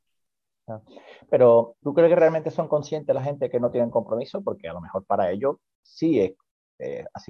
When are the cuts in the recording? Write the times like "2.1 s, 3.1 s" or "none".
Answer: 1.8 s

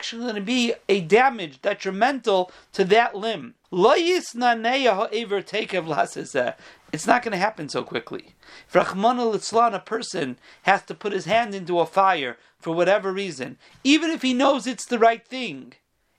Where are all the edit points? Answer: 3.6 s

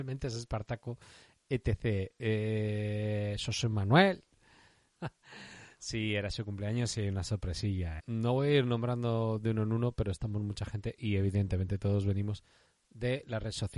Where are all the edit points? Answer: 4.9 s, 8.0 s

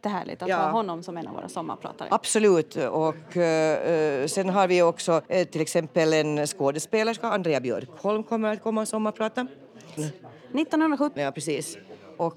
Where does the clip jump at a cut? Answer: 5.3 s, 10.0 s, 11.2 s

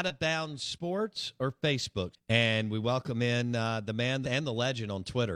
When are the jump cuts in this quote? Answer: 2.1 s, 4.2 s

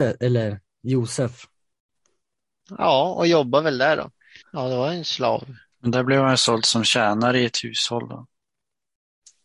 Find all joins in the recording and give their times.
4.4 s

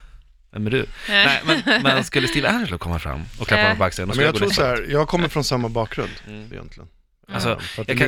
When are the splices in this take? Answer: 6.5 s

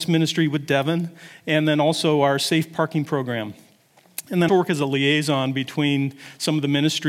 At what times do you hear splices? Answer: 4.5 s

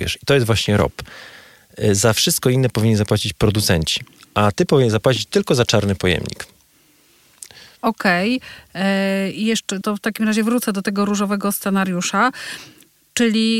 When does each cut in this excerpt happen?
9.8 s

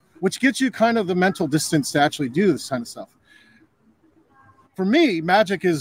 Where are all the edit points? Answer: none

